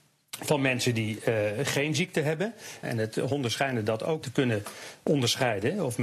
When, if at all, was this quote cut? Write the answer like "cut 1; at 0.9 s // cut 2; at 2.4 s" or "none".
cut 1; at 2.8 s // cut 2; at 4.2 s